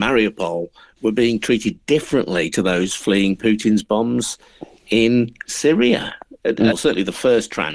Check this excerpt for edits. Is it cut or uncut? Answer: cut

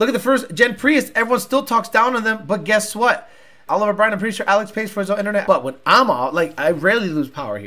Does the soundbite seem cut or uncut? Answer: cut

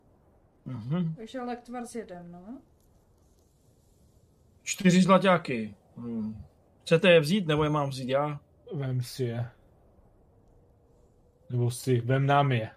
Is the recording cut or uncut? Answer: uncut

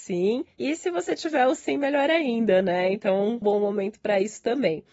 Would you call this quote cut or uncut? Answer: cut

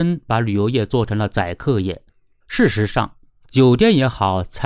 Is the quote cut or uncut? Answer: uncut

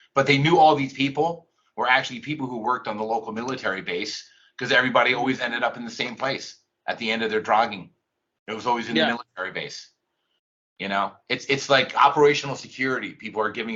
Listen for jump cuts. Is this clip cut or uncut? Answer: uncut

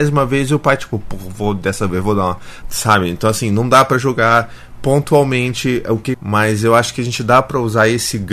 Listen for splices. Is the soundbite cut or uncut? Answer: cut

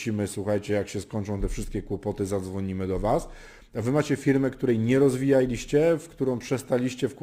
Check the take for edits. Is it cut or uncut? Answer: uncut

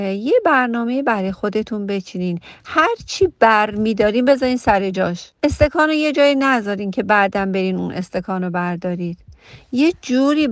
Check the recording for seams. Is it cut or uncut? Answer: cut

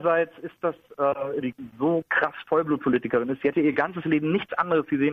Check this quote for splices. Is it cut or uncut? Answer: cut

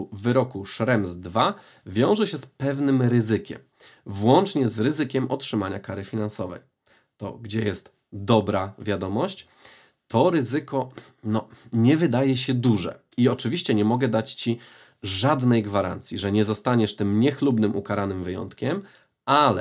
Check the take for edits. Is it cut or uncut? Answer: uncut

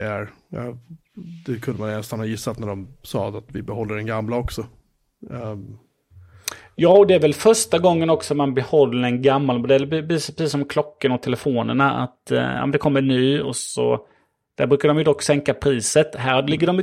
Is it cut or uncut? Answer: uncut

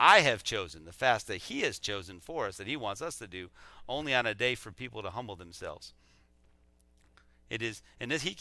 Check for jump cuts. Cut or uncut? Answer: uncut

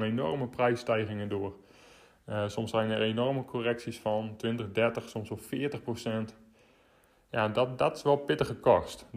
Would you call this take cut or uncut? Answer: uncut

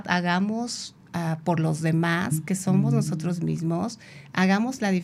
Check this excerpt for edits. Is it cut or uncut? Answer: uncut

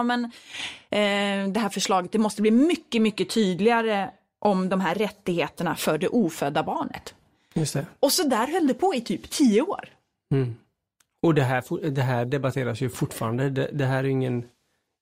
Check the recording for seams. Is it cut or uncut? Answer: uncut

